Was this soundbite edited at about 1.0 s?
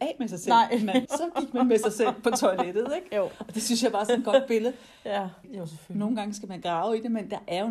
yes; 2 cuts; at 1.0 s, 5.4 s

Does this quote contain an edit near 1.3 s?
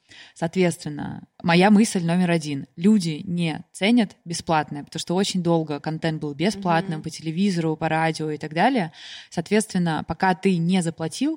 yes; 1 cut; at 1.3 s

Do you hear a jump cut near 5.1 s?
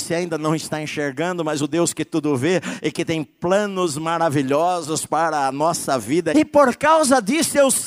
no; 1 cut; at 6.3 s

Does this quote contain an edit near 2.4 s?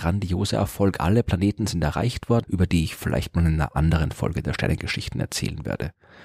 yes; 1 cut; at 2.4 s

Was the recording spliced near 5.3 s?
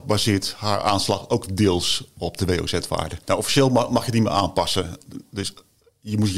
no; 0 cuts

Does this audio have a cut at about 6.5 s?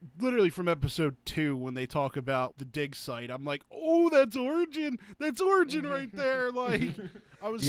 no; 1 cut; at 2.5 s

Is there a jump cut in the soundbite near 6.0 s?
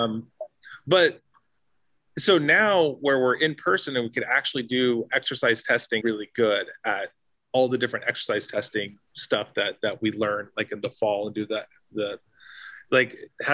yes; 1 cut; at 6.0 s

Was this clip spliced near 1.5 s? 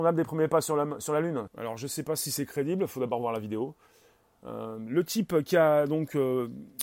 yes; 1 cut; at 1.5 s

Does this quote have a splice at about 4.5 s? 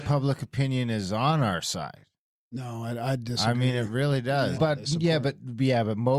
yes; 1 cut; at 4.5 s

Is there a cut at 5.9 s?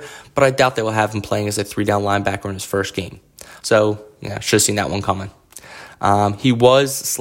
no; 1 cut; at 3.6 s

